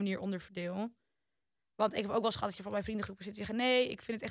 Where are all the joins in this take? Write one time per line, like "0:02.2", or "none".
none